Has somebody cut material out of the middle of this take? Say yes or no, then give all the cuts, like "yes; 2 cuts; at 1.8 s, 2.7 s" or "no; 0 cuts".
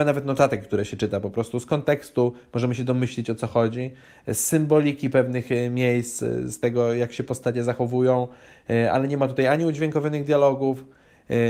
no; 0 cuts